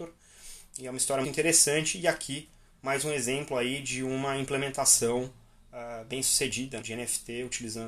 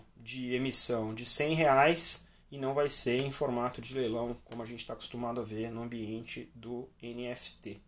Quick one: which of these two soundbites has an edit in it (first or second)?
first